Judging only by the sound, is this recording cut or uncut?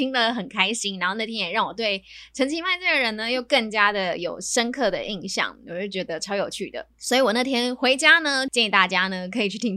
cut